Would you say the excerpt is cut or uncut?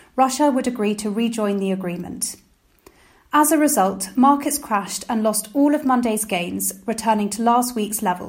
uncut